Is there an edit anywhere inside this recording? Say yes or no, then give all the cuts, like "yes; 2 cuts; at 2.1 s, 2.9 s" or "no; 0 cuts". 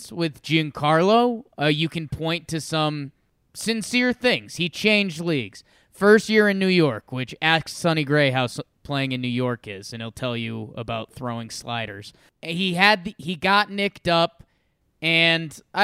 no; 0 cuts